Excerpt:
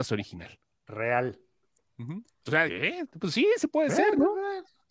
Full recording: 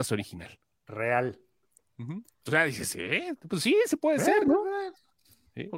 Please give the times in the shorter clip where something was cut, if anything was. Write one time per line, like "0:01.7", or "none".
0:02.7